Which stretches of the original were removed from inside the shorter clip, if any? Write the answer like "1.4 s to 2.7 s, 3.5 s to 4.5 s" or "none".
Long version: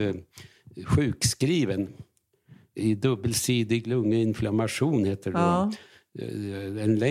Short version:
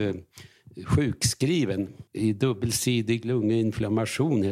2.1 s to 2.7 s

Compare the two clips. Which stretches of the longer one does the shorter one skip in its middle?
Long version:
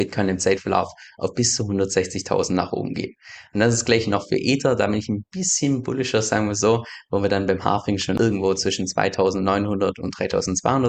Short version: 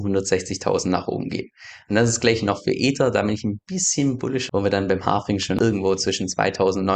6.1 s to 7.1 s

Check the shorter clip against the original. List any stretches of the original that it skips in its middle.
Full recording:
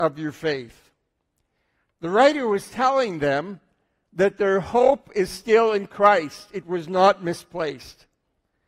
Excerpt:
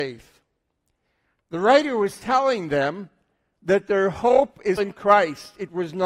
5.3 s to 5.7 s

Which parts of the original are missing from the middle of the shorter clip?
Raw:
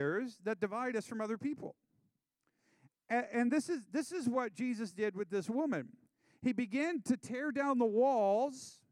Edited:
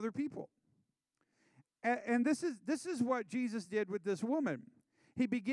none

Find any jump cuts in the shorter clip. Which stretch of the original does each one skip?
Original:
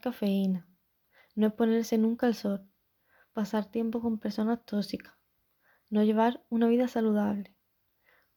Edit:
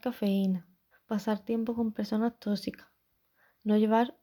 0.9 s to 3.2 s

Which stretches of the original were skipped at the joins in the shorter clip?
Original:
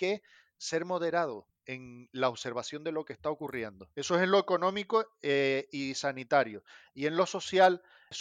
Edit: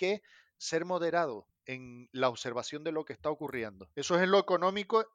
none

